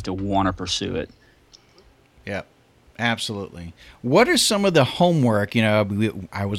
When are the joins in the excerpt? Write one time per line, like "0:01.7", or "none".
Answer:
none

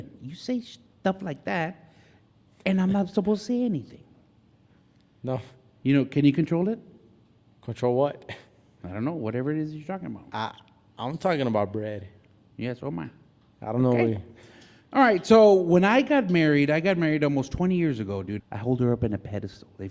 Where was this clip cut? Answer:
0:18.4

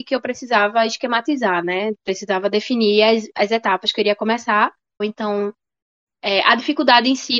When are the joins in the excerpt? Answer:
0:05.0

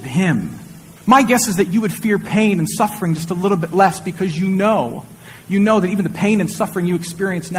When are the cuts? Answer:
0:01.0

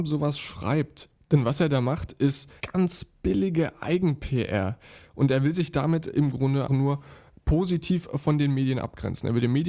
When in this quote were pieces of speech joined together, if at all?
0:02.6
0:06.7

